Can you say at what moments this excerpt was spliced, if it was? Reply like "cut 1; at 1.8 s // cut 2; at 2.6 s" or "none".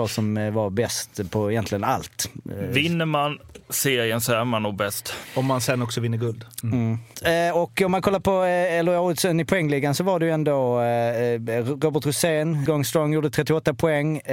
cut 1; at 6.6 s // cut 2; at 12.7 s